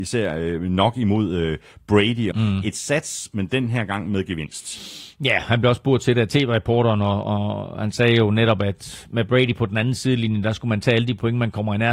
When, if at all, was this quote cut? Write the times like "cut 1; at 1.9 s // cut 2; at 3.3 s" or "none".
cut 1; at 2.3 s